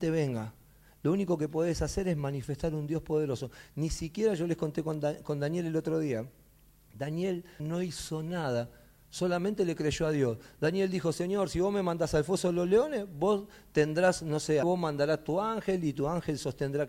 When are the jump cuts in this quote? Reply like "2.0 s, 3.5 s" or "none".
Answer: 7.6 s, 14.6 s